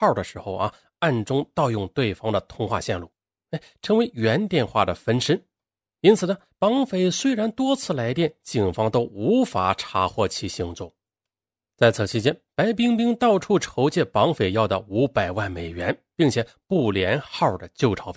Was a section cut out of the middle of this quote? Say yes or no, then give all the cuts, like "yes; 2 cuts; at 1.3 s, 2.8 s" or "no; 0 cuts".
no; 0 cuts